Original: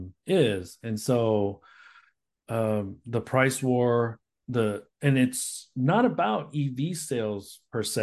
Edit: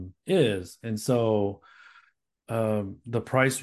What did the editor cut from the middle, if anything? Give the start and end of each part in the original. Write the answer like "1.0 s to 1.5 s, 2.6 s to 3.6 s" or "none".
none